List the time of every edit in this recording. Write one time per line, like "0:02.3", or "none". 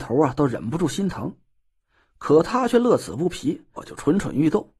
0:03.8